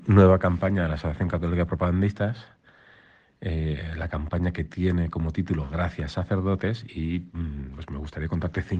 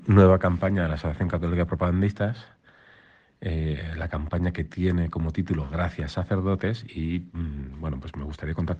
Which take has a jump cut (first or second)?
first